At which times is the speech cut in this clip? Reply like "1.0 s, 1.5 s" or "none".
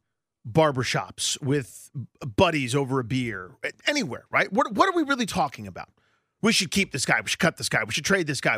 none

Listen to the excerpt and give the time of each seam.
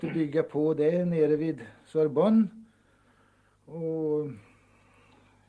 none

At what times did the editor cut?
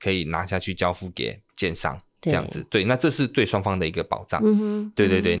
1.5 s

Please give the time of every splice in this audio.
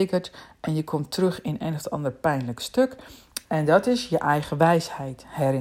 3.4 s

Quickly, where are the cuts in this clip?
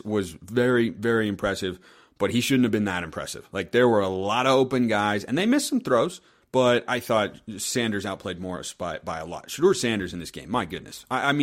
6.9 s

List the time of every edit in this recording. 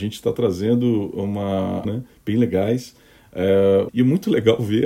1.8 s, 3.9 s

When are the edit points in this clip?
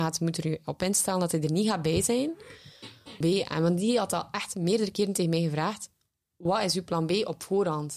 3.2 s

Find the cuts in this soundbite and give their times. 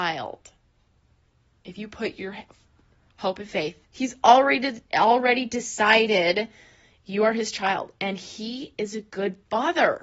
3.9 s

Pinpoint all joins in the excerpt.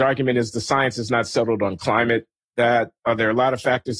2.4 s

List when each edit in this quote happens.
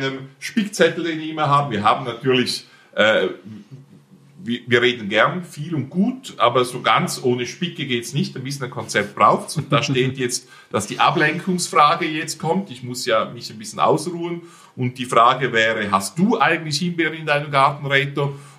none

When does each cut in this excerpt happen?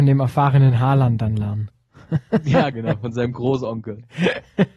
2.7 s

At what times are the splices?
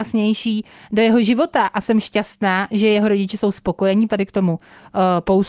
4.1 s

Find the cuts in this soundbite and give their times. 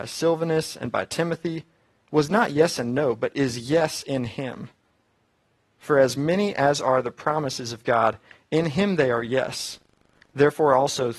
none

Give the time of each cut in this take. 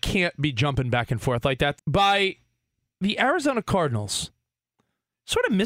1.8 s

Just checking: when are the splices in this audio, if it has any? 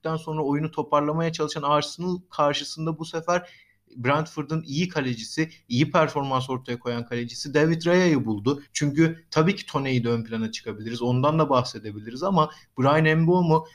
8.7 s

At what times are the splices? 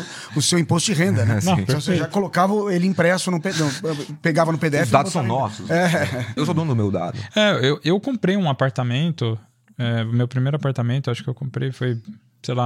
6.4 s

